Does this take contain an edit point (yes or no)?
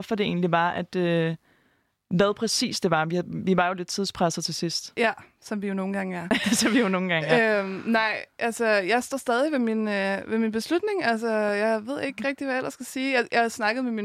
no